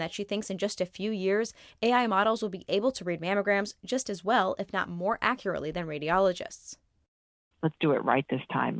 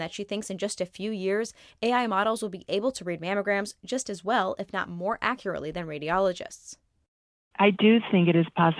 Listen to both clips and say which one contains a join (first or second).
first